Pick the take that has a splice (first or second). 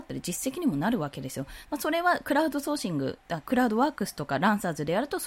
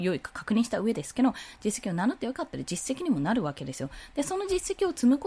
first